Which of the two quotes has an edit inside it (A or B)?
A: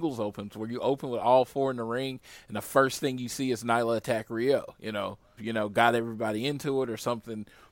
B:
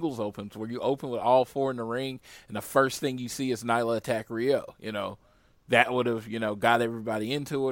A